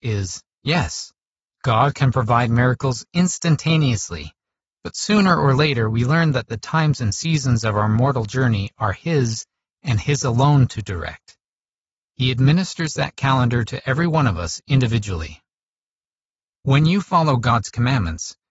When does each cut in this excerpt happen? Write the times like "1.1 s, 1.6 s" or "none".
none